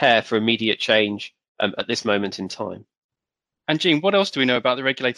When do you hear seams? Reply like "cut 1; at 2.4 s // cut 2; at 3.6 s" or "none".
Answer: none